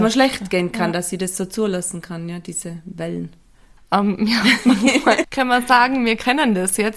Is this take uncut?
no; 2 cuts; at 3.8 s, 5.2 s

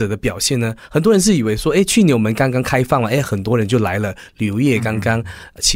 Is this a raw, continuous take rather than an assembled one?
yes; 0 cuts

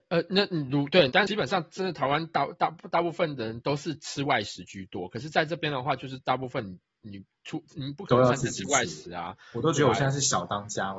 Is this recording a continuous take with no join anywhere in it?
no; 1 cut; at 1.1 s

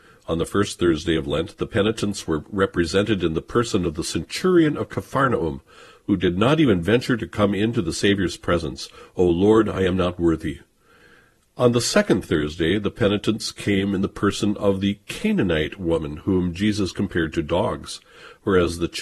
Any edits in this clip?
no; 0 cuts

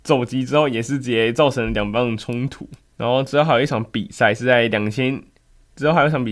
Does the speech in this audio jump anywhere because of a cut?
no; 0 cuts

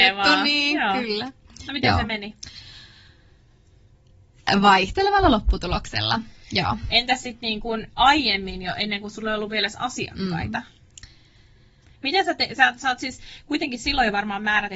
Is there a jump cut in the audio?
no; 0 cuts

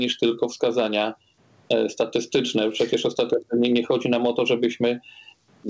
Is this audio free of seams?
yes; 0 cuts

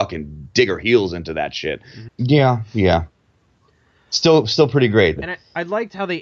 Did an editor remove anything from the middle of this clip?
yes; 2 cuts; at 2.1 s, 5.2 s

